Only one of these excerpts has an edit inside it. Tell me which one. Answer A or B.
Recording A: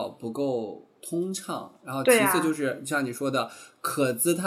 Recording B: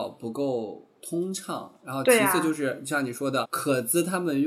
B